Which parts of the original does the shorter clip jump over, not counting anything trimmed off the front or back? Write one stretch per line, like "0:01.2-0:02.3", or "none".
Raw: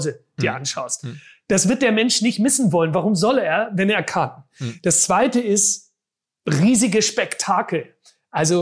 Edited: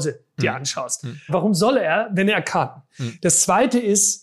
0:01.3-0:02.9